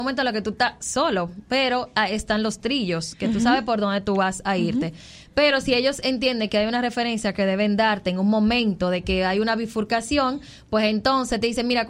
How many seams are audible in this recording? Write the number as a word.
zero